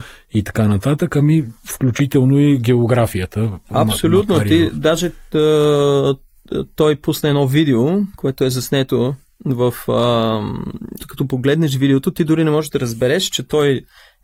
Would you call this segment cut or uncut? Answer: cut